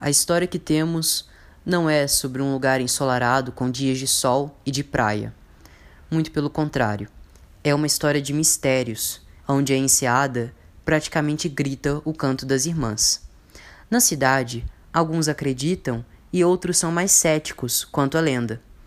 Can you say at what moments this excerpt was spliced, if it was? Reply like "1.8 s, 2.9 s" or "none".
9.4 s